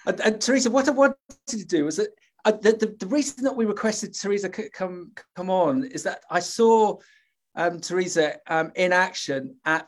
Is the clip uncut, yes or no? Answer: yes